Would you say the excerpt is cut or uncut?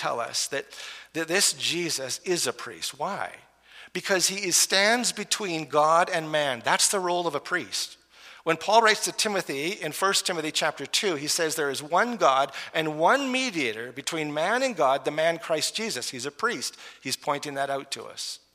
uncut